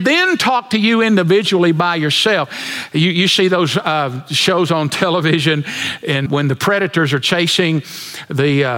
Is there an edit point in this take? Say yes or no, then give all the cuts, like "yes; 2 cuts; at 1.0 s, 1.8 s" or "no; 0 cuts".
yes; 1 cut; at 6.3 s